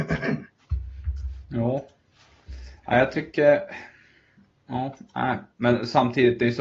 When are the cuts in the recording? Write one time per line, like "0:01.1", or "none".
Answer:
none